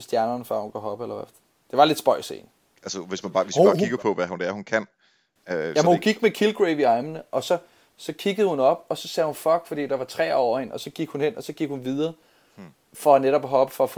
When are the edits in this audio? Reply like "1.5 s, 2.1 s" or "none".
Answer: none